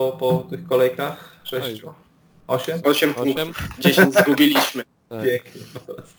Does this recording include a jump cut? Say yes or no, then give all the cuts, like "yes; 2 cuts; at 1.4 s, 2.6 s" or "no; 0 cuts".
no; 0 cuts